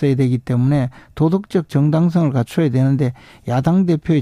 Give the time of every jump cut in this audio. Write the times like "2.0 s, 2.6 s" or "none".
none